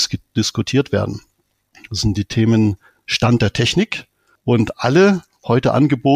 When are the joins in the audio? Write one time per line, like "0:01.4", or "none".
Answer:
0:04.4

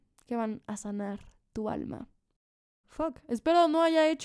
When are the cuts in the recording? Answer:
0:02.8

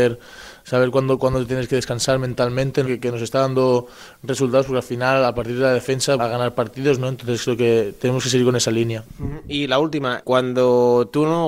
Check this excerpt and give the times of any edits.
0:02.9
0:06.2
0:10.2

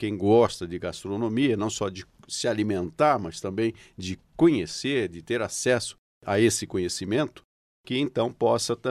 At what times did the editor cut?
none

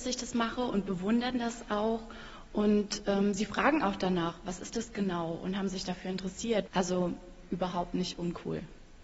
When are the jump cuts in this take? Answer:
0:06.7

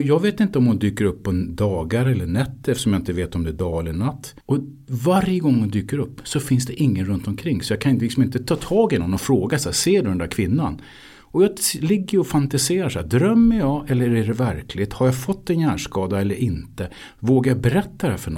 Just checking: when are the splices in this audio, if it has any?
0:04.4

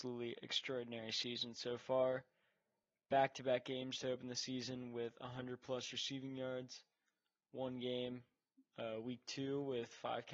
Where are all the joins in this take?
none

